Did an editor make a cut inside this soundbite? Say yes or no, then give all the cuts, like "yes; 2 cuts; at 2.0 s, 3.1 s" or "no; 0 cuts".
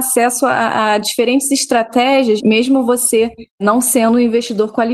no; 0 cuts